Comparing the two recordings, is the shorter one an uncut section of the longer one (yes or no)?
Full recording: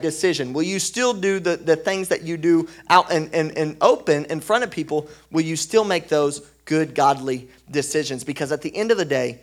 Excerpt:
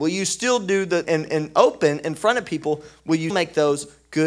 no